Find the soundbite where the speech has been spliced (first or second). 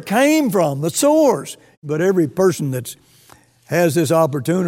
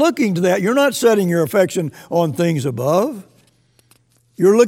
first